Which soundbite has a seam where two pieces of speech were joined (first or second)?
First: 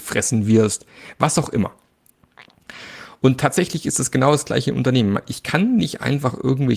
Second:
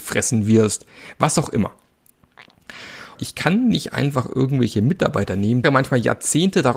second